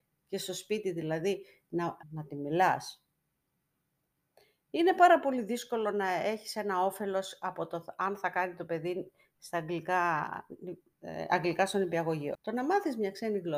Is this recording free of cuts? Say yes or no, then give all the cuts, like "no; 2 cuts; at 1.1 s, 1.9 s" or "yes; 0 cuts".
no; 2 cuts; at 2.0 s, 12.4 s